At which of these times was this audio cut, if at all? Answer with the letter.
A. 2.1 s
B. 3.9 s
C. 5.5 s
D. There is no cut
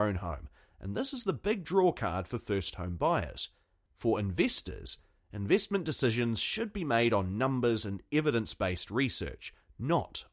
B